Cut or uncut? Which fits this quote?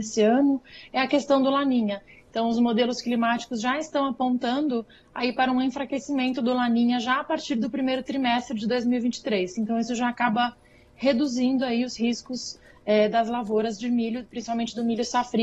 uncut